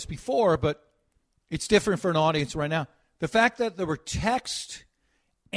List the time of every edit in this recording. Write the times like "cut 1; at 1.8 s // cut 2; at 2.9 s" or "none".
none